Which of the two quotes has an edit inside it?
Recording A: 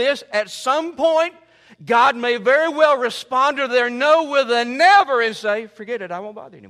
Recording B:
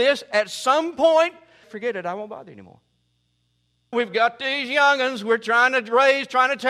B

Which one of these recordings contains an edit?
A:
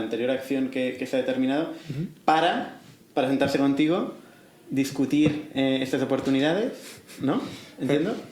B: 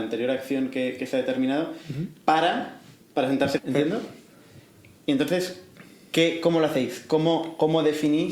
B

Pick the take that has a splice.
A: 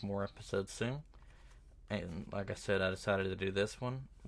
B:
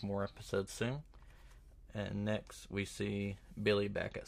B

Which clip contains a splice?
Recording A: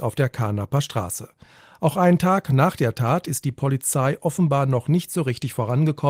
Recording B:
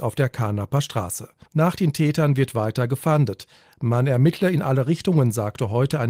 B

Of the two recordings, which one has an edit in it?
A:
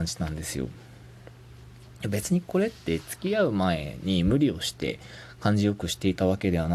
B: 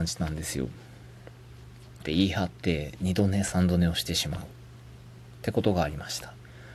B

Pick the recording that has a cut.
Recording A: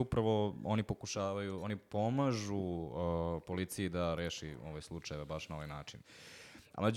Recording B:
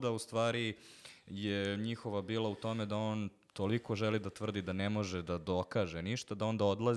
A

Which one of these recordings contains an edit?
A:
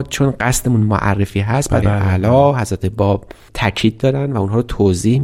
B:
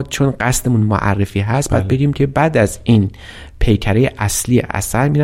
A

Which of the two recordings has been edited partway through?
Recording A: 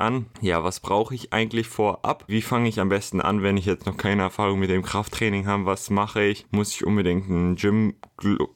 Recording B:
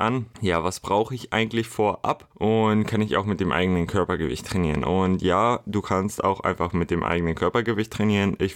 A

